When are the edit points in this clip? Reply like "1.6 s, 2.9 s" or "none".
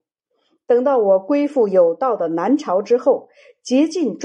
none